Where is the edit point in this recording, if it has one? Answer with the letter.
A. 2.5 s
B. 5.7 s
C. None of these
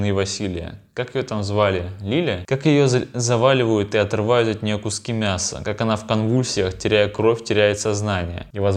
C